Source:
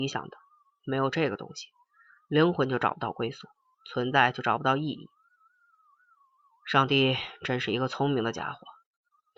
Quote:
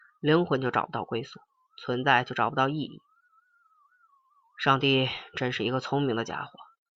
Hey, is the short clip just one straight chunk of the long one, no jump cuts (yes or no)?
yes